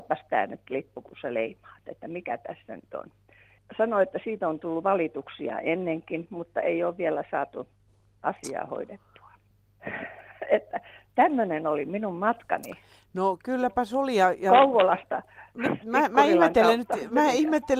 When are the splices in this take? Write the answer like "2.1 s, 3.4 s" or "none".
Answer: none